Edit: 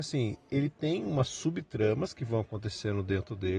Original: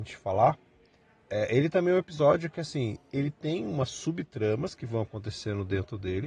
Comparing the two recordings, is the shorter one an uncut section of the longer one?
yes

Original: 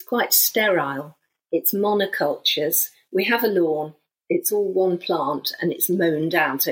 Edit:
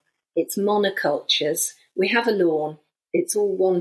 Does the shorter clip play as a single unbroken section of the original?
yes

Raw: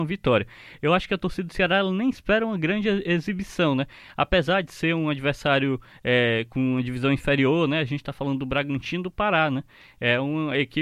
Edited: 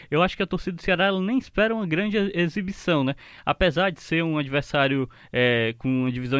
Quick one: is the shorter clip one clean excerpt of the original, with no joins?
yes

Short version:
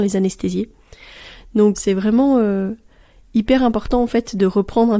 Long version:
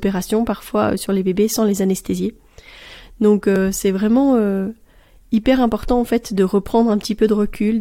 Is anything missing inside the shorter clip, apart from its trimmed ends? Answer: yes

